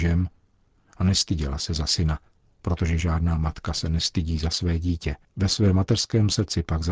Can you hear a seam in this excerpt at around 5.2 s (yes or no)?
yes